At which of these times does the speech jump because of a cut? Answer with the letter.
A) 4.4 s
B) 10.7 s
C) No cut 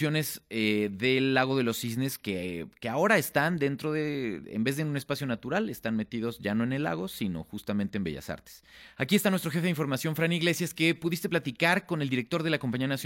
A